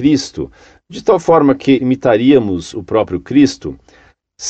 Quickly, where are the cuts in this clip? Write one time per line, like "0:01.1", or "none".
0:01.8

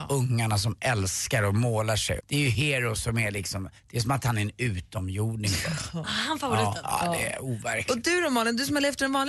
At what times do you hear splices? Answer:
0:02.2

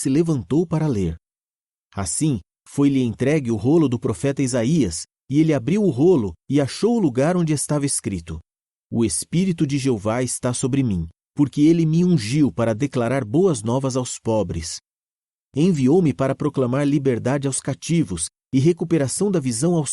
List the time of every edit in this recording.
none

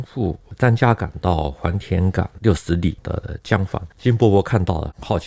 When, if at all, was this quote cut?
0:03.9

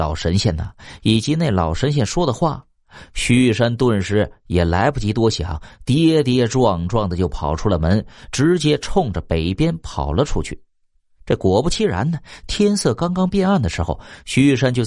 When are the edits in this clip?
none

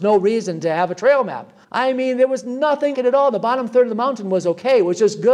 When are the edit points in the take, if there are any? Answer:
0:01.6
0:02.9

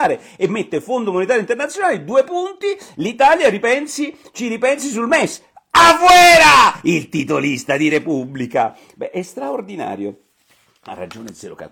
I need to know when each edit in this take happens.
none

